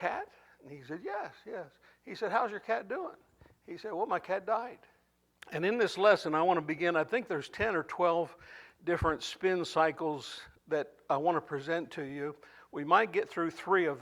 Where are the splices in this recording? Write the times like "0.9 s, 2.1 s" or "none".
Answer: 5.3 s